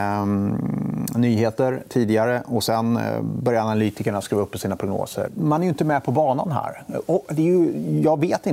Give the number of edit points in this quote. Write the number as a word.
one